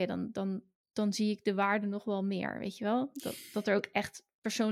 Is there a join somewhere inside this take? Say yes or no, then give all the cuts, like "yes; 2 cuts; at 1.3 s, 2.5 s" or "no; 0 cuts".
no; 0 cuts